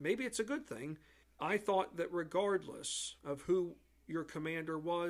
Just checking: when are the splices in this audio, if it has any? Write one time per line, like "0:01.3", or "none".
0:01.2
0:03.2